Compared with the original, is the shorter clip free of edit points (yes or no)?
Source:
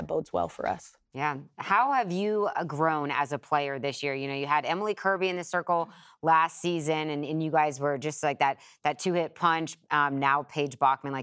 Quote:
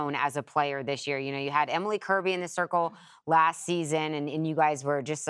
yes